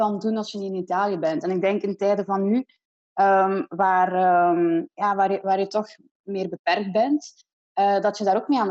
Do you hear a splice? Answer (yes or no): no